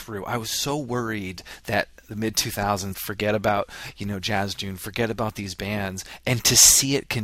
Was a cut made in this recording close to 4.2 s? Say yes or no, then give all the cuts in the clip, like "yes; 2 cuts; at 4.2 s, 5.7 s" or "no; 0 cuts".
no; 1 cut; at 2.9 s